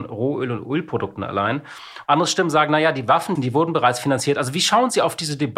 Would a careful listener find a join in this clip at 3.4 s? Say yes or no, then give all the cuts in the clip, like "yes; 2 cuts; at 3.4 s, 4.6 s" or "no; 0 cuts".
yes; 2 cuts; at 2.1 s, 3.4 s